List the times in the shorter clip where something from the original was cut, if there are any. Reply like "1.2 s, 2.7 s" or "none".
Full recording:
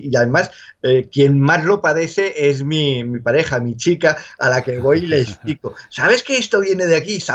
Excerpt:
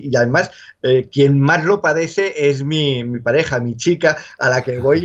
none